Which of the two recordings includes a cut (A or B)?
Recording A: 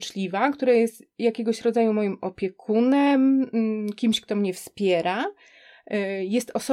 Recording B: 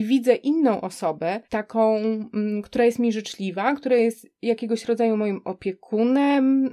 B